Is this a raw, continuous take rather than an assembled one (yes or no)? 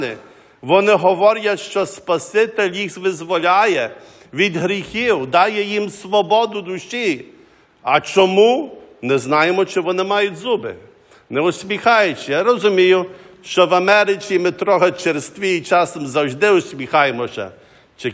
yes